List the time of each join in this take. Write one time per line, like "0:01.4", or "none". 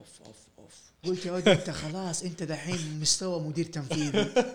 0:01.0